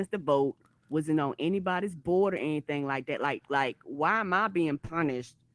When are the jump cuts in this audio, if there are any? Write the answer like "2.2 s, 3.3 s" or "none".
none